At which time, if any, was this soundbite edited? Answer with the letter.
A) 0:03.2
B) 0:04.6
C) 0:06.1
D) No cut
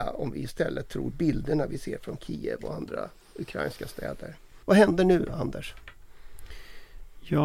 B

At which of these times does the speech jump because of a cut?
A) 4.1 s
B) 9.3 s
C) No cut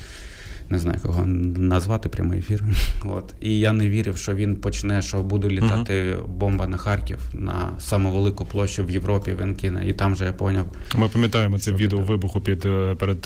C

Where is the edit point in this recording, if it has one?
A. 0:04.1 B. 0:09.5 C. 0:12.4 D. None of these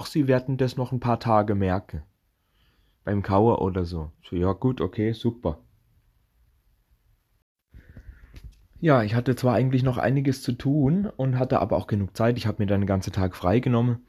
A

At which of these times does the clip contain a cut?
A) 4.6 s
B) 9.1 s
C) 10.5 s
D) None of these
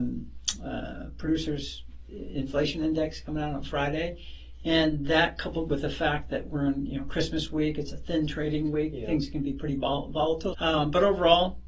C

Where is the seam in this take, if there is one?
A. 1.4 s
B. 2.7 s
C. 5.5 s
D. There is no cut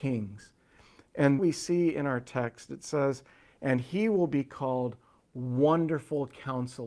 A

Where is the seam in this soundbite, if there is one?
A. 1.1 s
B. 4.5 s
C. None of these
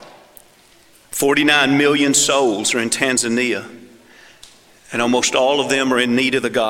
C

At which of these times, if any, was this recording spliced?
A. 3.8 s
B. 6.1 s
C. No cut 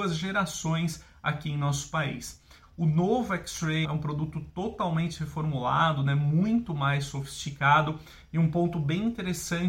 A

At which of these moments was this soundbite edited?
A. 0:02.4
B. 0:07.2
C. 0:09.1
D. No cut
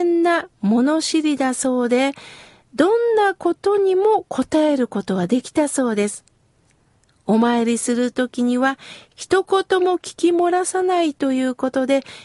D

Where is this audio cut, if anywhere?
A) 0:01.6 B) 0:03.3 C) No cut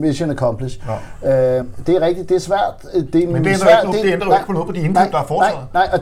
C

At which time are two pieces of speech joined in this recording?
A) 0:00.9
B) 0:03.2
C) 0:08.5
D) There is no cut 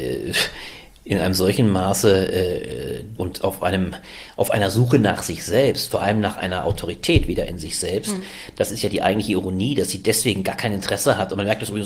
B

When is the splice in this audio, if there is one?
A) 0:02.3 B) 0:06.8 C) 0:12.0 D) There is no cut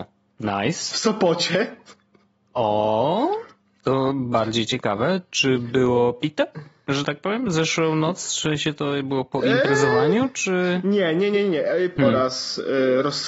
C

